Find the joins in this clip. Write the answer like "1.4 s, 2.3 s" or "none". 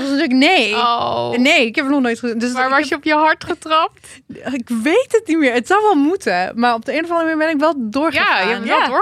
none